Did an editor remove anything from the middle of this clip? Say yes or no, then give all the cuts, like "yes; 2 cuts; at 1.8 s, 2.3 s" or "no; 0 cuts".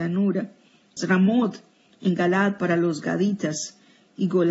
yes; 1 cut; at 1.0 s